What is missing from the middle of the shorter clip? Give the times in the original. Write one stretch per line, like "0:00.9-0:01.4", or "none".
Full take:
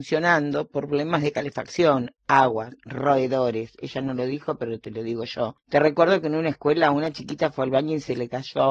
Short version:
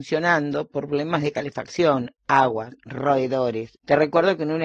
0:03.8-0:05.6